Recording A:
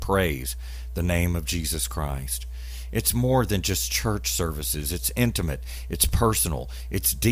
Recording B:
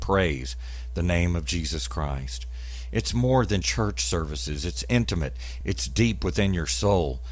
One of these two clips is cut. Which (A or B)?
B